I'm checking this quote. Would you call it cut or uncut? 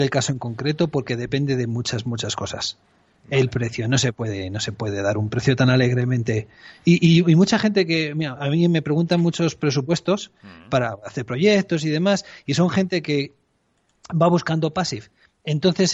uncut